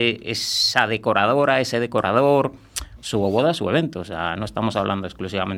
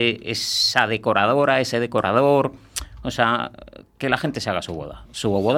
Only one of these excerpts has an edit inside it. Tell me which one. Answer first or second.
first